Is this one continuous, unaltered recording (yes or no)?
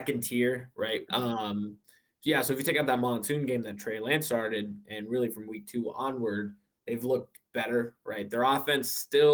no